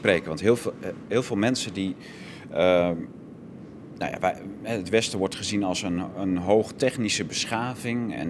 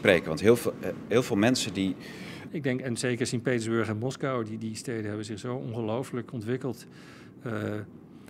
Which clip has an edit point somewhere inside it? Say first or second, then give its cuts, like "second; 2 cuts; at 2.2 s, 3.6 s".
second; 1 cut; at 2.5 s